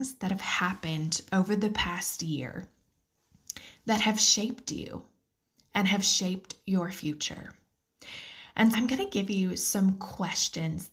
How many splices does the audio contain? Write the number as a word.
one